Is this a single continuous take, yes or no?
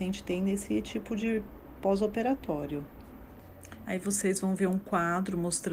no